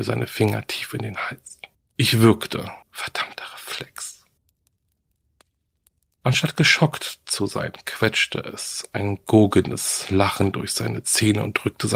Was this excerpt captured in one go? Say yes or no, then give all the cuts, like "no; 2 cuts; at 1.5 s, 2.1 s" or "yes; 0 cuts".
no; 1 cut; at 2.8 s